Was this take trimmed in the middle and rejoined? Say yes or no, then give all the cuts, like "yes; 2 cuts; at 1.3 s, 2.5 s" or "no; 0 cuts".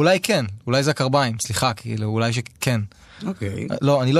no; 0 cuts